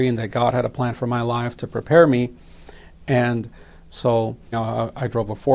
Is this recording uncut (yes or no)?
no